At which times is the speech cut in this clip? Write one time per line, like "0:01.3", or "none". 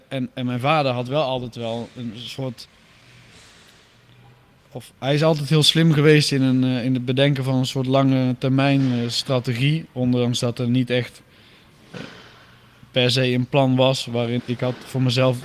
0:14.4